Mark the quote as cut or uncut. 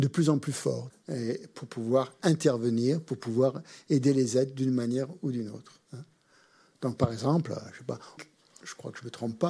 cut